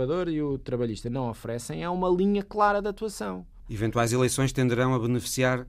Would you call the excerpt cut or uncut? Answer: cut